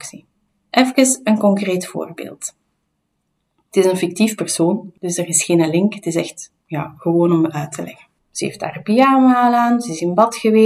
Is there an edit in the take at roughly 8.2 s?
yes; 1 cut; at 8.2 s

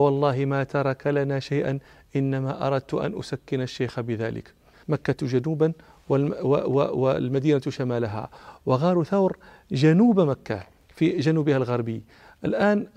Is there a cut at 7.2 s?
no; 1 cut; at 4.8 s

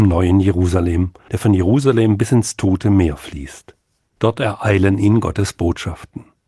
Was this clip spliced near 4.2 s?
yes; 2 cuts; at 1.3 s, 4.2 s

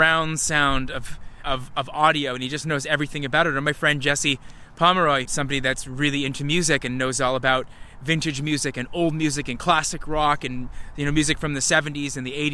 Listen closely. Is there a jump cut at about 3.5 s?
no; 2 cuts; at 1.4 s, 5.3 s

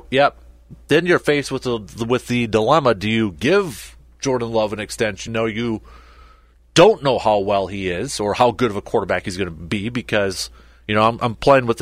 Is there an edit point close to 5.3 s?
yes; 1 cut; at 5.3 s

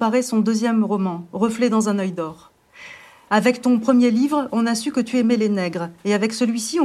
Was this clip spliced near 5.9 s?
no; 1 cut; at 3.3 s

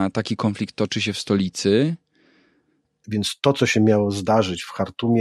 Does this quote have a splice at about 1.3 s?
no; 1 cut; at 3.0 s

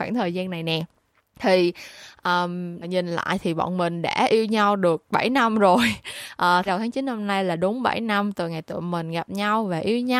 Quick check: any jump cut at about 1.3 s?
no; 2 cuts; at 2.8 s, 6.7 s

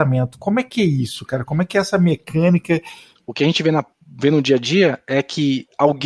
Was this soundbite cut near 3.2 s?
yes; 1 cut; at 3.2 s

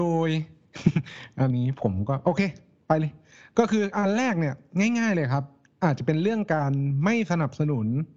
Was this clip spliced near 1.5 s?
yes; 1 cut; at 1.5 s

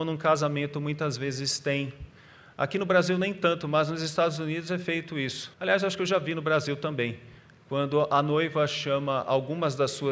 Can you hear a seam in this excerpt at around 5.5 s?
yes; 1 cut; at 5.5 s

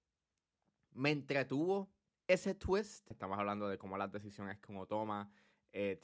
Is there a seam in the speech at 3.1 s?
yes; 1 cut; at 3.1 s

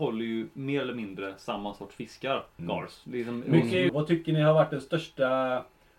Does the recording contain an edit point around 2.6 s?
yes; 2 cuts; at 2.6 s, 3.9 s

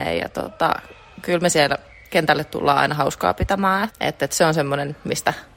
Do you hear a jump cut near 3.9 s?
yes; 1 cut; at 3.9 s

